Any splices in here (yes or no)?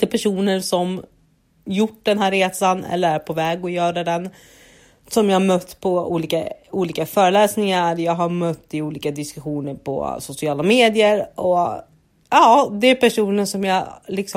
no